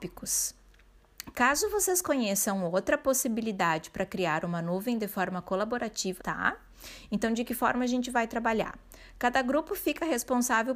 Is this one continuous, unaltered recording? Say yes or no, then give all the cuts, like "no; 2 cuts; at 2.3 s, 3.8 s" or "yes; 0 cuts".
no; 2 cuts; at 1.3 s, 6.2 s